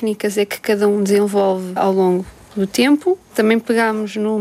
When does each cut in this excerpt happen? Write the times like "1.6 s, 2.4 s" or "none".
1.8 s